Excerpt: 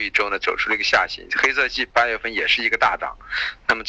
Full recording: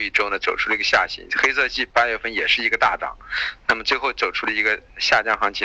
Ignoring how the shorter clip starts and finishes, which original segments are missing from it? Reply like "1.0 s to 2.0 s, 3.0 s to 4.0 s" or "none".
none